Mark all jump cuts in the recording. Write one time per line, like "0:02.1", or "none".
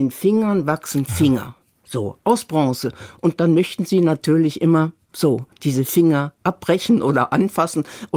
none

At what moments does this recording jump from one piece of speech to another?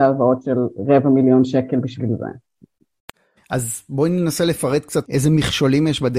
0:03.4
0:05.0

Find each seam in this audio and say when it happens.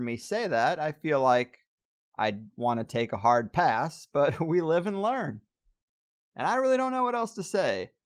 none

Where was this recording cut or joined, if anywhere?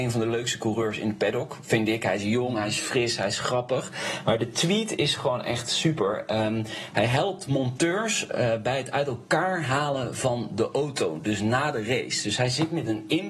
none

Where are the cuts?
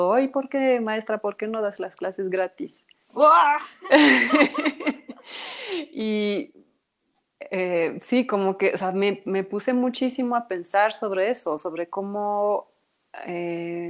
none

